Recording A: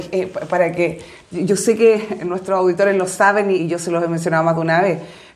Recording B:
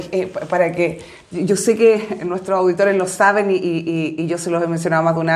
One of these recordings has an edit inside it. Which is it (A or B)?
A